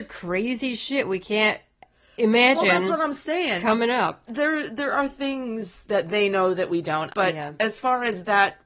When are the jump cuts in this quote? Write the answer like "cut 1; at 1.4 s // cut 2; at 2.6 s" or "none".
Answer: cut 1; at 4.3 s // cut 2; at 7.1 s